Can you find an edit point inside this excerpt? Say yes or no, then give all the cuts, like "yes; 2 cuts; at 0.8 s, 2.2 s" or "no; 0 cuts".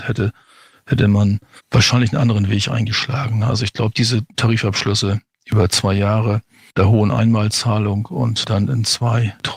no; 0 cuts